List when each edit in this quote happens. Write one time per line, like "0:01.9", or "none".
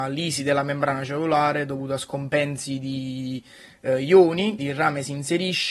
0:04.6